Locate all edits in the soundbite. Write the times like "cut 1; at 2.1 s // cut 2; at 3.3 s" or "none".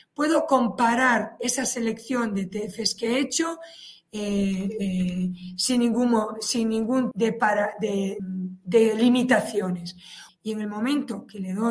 cut 1; at 7.1 s // cut 2; at 8.2 s // cut 3; at 10.3 s